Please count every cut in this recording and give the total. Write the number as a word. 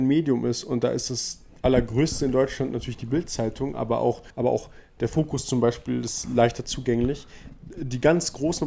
one